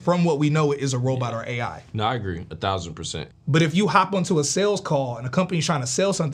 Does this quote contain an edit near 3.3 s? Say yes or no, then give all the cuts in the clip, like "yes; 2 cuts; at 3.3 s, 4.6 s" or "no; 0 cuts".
yes; 1 cut; at 3.3 s